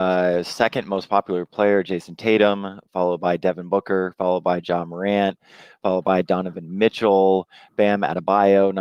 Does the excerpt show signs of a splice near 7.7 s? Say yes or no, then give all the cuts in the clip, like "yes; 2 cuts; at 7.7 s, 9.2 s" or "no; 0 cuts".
no; 0 cuts